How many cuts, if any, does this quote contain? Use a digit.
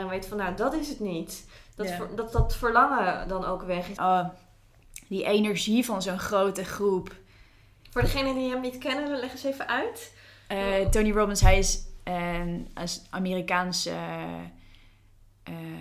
2